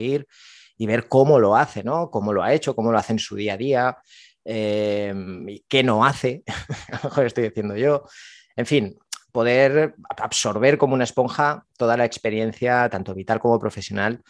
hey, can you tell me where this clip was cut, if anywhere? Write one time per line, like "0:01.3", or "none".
none